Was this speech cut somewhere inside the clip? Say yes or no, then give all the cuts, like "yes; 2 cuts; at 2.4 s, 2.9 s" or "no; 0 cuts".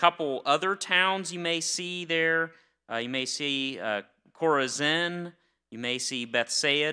no; 0 cuts